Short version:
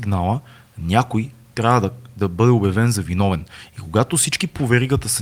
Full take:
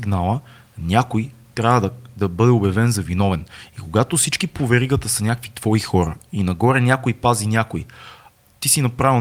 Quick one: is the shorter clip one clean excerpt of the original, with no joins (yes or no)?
yes